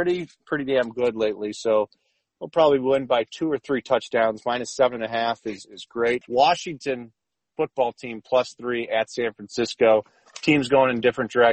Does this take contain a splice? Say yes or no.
yes